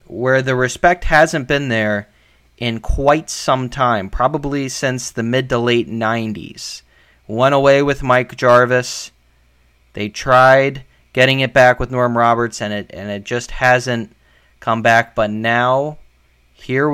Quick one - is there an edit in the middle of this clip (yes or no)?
no